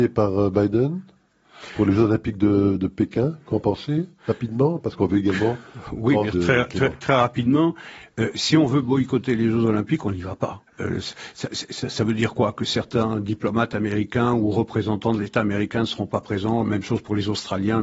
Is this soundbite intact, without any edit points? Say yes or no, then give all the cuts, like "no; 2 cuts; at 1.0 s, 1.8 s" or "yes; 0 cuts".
no; 2 cuts; at 6.3 s, 10.7 s